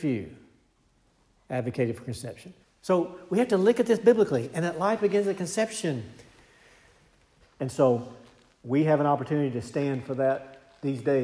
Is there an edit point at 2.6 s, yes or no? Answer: yes